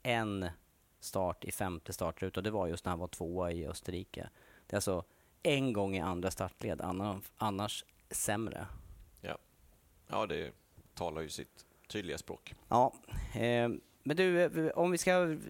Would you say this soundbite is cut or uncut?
uncut